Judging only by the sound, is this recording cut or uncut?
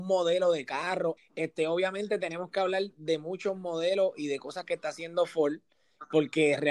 cut